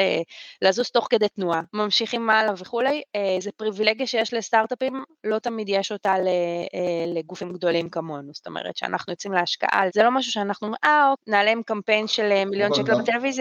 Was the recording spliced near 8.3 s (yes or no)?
no